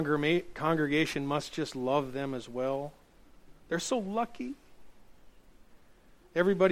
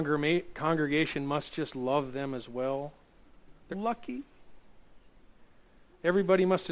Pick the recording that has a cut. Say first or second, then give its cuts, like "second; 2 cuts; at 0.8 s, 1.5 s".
second; 1 cut; at 3.7 s